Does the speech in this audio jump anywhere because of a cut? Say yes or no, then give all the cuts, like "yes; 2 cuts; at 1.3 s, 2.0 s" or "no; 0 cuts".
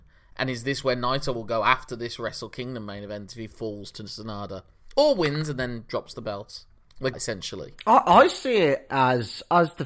yes; 1 cut; at 7.1 s